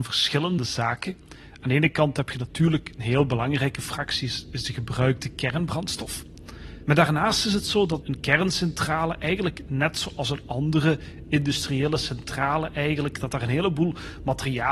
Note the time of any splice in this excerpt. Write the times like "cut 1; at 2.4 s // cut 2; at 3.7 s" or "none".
cut 1; at 6.8 s // cut 2; at 8.0 s